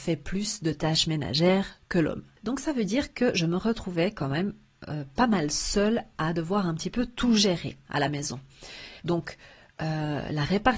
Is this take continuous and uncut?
no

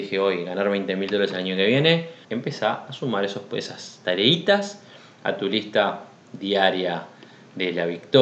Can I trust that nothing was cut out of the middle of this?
no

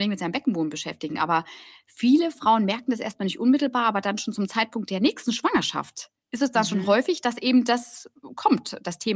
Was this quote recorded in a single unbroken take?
yes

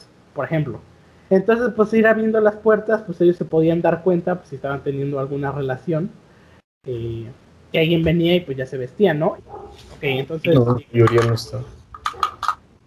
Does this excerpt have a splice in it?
yes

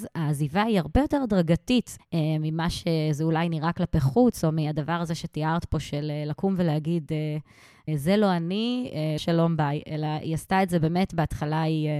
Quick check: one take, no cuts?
no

